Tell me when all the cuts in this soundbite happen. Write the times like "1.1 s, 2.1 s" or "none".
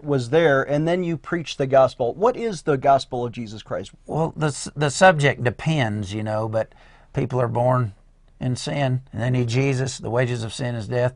3.9 s, 7.1 s, 9.1 s